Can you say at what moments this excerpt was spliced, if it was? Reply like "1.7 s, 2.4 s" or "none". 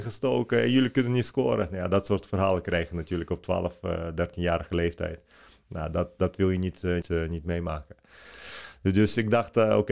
7.0 s